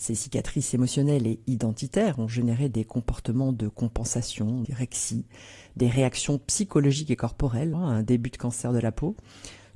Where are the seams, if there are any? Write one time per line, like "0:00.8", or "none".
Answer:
0:04.6
0:07.7